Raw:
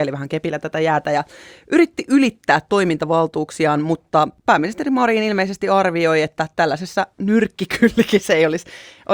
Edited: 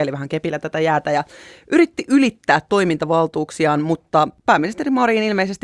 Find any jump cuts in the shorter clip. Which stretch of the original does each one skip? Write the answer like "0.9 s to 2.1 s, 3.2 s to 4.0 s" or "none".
none